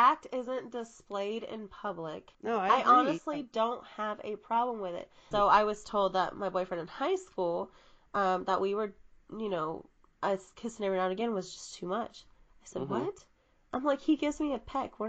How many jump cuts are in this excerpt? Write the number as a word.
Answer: two